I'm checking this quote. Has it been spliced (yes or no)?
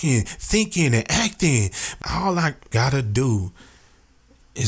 no